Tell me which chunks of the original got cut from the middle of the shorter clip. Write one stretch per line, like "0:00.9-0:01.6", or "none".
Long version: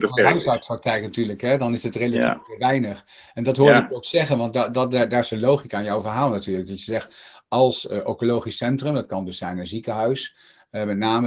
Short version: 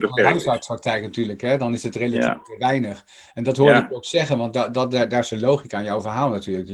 none

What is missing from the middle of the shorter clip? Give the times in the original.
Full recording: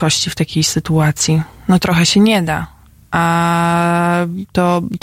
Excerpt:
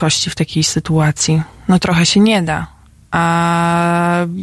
none

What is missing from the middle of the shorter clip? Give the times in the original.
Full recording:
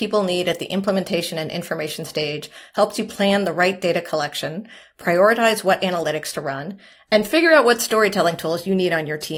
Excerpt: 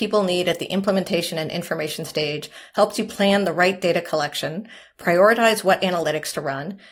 none

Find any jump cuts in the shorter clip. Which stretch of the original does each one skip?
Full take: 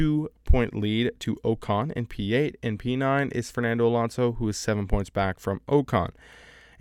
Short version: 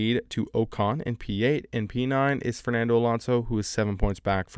none

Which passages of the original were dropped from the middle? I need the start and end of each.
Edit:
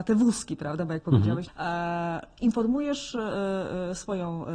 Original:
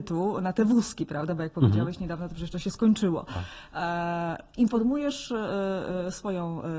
0:02.0-0:03.6

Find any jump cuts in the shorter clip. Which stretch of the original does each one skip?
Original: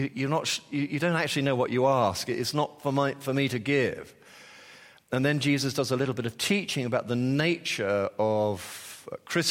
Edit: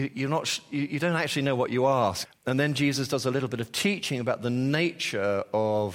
0:02.3-0:04.9

